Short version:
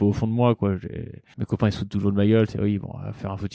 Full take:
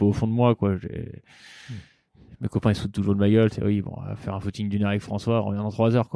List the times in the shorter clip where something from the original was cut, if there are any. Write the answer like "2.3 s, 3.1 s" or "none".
1.3 s